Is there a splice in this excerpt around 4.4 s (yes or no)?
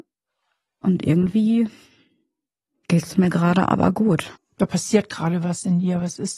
yes